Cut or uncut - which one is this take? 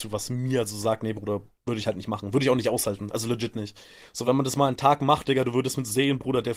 uncut